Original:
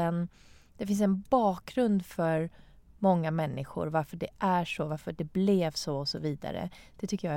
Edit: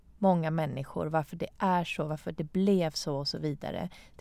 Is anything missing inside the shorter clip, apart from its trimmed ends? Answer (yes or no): no